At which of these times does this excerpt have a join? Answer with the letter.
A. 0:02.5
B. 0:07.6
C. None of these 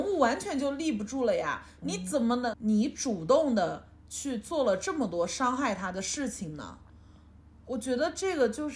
A